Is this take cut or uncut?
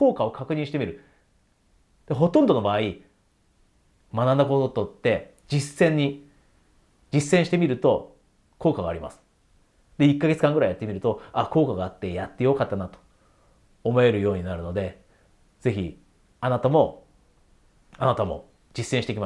uncut